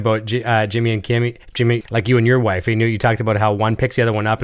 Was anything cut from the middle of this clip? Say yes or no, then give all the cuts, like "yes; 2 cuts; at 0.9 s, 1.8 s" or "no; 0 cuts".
yes; 1 cut; at 1.8 s